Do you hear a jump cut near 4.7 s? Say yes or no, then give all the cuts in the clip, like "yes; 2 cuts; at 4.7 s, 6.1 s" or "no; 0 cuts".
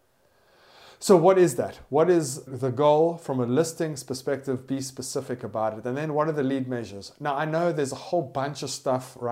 no; 1 cut; at 2.5 s